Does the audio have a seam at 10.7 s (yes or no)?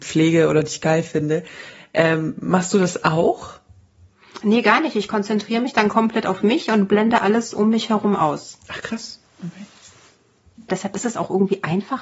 yes